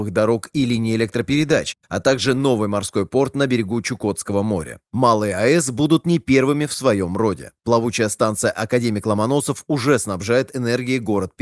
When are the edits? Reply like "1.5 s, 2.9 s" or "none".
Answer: 4.9 s